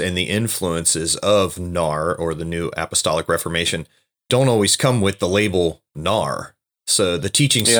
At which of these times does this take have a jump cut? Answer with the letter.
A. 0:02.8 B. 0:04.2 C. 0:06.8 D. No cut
D